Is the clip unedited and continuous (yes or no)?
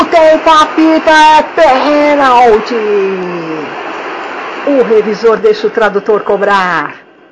yes